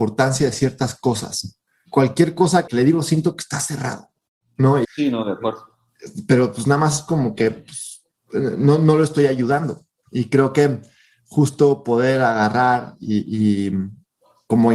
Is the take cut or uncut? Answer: cut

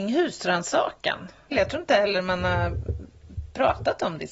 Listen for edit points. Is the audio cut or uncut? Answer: cut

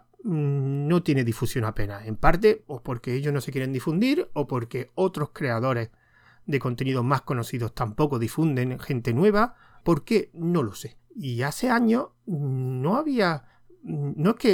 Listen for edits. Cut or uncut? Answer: cut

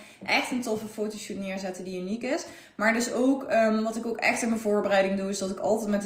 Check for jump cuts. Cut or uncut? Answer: uncut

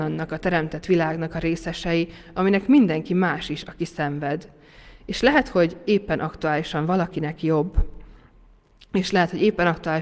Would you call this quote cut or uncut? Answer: uncut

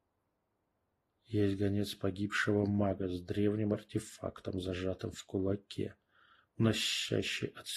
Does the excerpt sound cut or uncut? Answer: uncut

